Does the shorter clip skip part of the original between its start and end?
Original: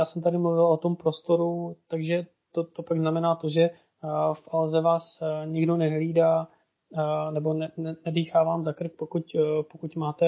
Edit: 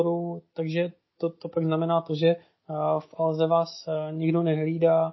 no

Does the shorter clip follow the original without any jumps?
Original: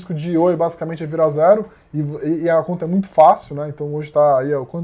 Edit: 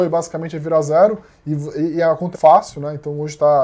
no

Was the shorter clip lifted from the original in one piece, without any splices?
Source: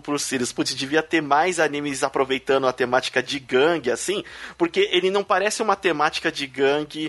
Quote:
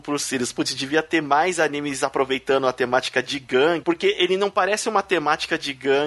no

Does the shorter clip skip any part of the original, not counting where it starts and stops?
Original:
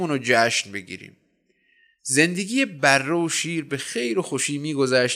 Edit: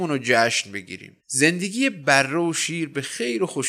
yes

